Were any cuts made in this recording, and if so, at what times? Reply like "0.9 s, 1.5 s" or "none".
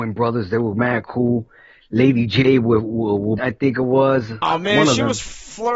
3.4 s, 4.4 s

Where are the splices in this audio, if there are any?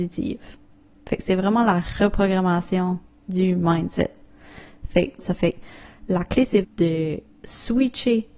5.2 s, 6.6 s

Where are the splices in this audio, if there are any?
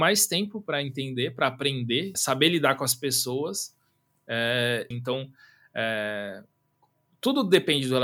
2.1 s, 4.9 s

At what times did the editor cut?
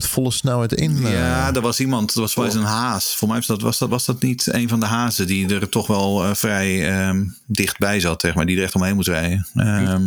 none

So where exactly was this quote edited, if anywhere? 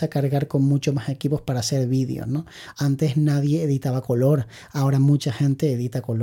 2.7 s

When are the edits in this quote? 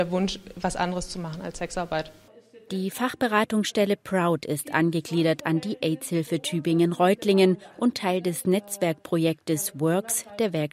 none

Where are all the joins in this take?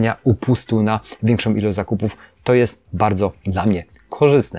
3.4 s

